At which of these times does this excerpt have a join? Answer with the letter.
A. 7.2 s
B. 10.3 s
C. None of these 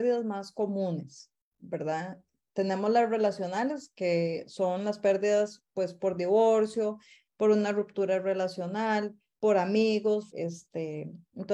B